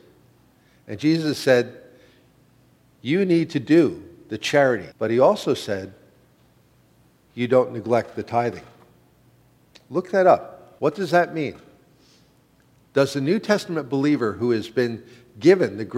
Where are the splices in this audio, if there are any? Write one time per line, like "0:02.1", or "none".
0:04.9
0:10.8